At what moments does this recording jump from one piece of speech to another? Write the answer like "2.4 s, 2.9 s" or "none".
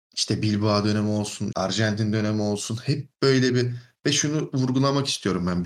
1.5 s